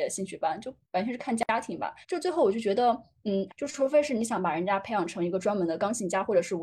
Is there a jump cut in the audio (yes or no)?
yes